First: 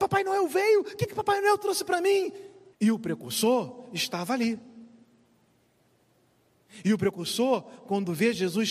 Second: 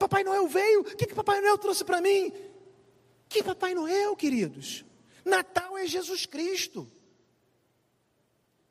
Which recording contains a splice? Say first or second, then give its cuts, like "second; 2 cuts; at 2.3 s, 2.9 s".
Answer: first; 1 cut; at 2.7 s